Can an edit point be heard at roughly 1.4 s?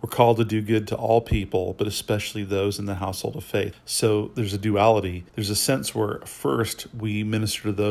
no; 2 cuts; at 3.7 s, 5.3 s

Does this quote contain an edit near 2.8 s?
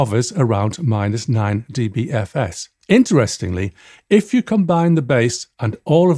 yes; 1 cut; at 2.8 s

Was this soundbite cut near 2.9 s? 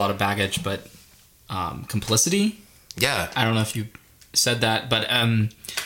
no; 0 cuts

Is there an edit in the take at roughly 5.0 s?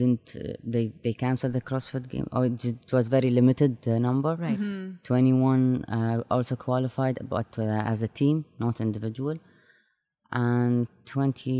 no; 0 cuts

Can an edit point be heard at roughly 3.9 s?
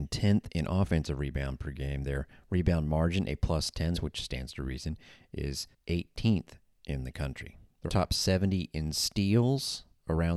yes; 2 cuts; at 3.9 s, 7.9 s

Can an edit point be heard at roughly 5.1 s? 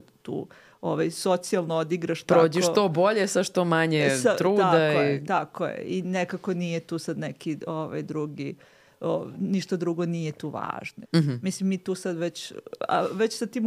no; 1 cut; at 11.0 s

